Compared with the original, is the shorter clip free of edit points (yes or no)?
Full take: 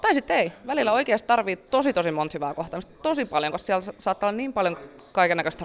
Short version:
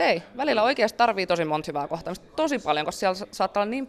no